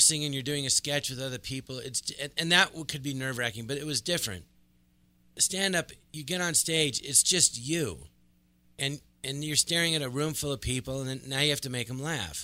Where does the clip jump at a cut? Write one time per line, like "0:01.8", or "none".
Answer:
none